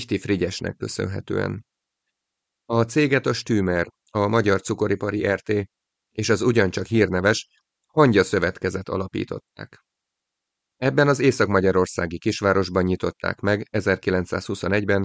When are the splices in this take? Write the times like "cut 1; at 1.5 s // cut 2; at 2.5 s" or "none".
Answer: cut 1; at 10.7 s